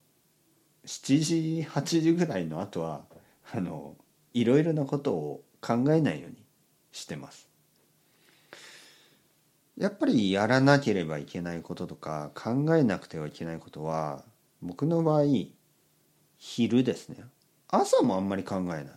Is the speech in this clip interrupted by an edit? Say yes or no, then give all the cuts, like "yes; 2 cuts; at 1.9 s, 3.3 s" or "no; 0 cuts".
no; 0 cuts